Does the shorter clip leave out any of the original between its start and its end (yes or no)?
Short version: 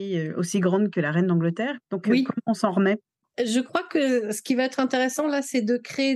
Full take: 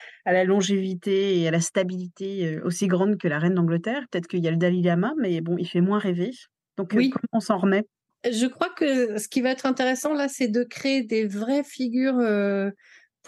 yes